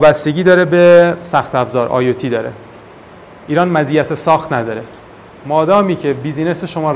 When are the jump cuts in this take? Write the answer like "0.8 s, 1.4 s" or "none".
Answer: none